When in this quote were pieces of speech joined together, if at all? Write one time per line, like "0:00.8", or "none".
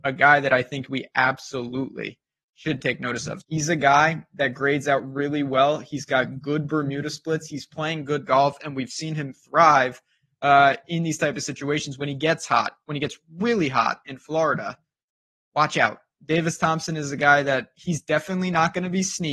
0:03.4